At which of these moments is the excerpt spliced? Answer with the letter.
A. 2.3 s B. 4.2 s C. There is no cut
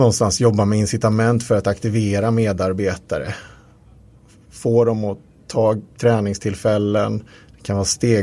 C